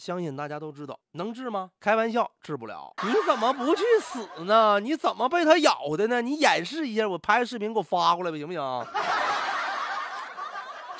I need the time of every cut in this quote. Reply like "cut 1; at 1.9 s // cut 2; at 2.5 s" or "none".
cut 1; at 3.0 s